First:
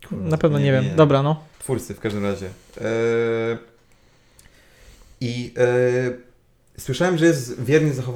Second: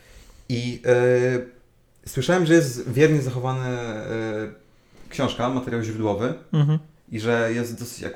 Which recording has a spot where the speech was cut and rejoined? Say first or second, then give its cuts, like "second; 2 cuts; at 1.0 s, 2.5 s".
first; 1 cut; at 1.5 s